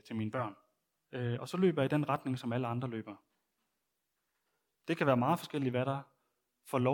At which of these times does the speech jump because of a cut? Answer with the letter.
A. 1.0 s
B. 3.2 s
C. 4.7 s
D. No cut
A